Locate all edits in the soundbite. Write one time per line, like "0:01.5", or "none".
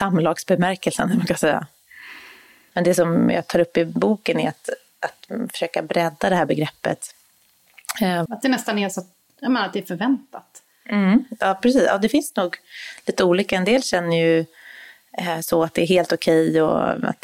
0:02.7
0:08.3